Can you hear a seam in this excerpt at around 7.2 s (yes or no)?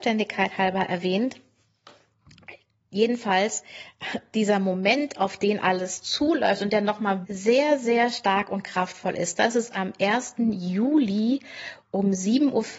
yes